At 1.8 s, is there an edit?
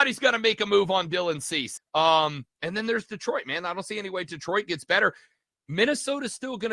yes; 1 cut; at 1.8 s

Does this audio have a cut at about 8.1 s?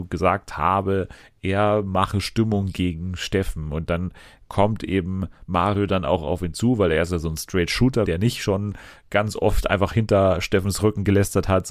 yes; 1 cut; at 8.1 s

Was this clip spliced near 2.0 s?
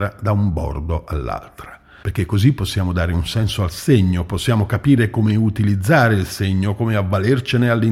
yes; 1 cut; at 2.0 s

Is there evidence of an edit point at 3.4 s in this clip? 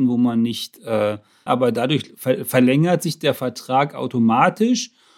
no; 1 cut; at 1.5 s

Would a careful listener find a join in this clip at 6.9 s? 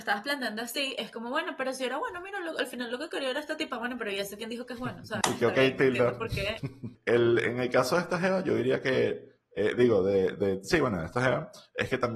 yes; 2 cuts; at 5.2 s, 6.9 s

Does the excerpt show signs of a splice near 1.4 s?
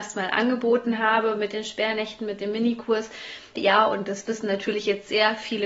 no; 1 cut; at 3.6 s

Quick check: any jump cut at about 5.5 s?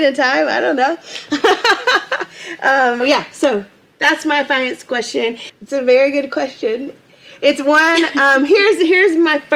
yes; 2 cuts; at 3.0 s, 5.5 s

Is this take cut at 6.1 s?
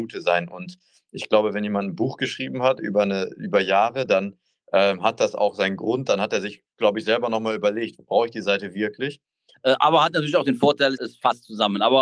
no; 2 cuts; at 9.5 s, 10.9 s

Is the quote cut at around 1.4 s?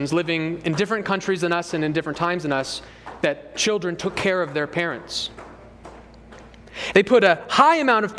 no; 1 cut; at 6.9 s

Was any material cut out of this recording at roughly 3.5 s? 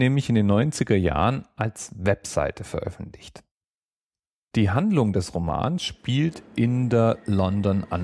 no; 0 cuts

